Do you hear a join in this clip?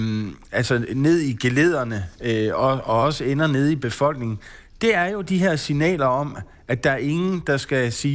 no; 0 cuts

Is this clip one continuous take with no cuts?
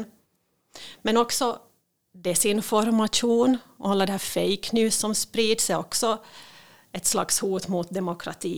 yes; 0 cuts

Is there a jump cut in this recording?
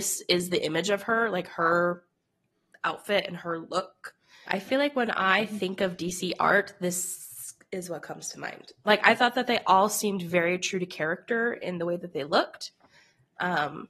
yes; 2 cuts; at 4.4 s, 8.9 s

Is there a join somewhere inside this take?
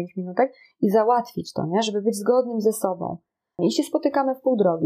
yes; 1 cut; at 3.6 s

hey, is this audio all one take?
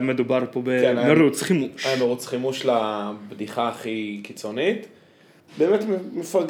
no; 1 cut; at 5.4 s

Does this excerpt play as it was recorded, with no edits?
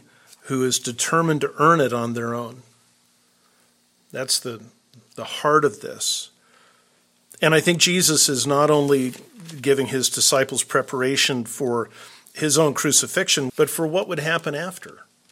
no; 1 cut; at 13.5 s

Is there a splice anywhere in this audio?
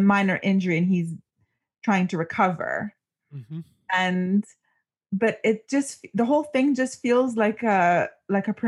no; 0 cuts

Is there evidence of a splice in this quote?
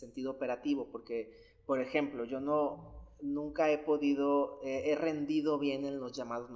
no; 0 cuts

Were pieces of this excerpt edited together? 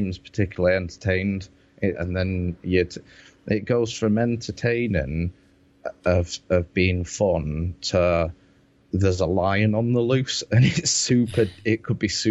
yes; 1 cut; at 1.9 s

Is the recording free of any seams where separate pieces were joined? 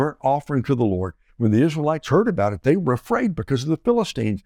no; 1 cut; at 1.3 s

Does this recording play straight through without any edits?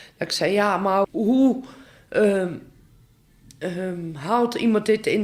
no; 1 cut; at 1.0 s

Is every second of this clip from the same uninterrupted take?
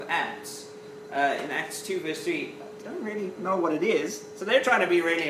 no; 1 cut; at 2.8 s

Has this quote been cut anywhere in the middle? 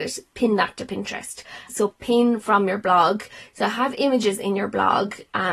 yes; 1 cut; at 1.7 s

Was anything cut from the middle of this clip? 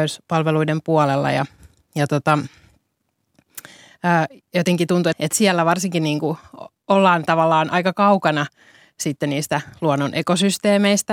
yes; 1 cut; at 5.1 s

